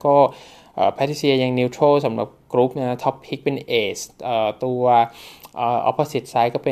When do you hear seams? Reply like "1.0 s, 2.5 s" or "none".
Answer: none